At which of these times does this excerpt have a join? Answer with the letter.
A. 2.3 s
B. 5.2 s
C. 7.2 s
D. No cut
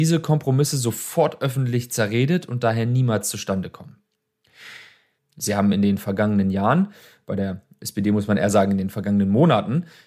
B